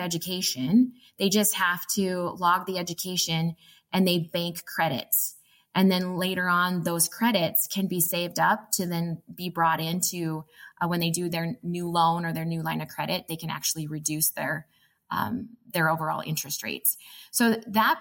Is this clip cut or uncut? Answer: uncut